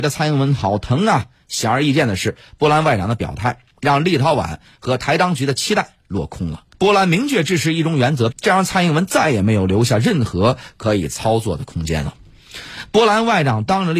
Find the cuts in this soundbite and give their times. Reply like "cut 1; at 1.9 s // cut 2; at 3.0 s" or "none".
cut 1; at 6.7 s // cut 2; at 8.3 s